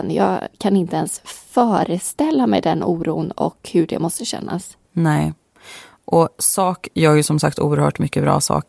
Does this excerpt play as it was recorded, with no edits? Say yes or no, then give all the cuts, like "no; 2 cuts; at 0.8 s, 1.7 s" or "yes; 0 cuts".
no; 1 cut; at 4.8 s